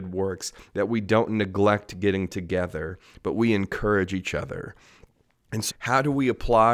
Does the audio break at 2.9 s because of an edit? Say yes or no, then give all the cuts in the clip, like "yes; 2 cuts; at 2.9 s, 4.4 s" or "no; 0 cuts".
no; 1 cut; at 5.7 s